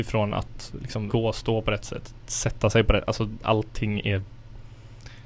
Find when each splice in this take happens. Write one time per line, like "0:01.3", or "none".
0:01.1